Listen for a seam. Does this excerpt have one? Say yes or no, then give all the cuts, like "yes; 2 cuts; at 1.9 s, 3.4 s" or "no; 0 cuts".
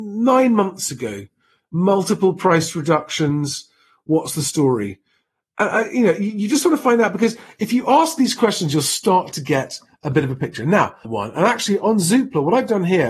yes; 1 cut; at 11.0 s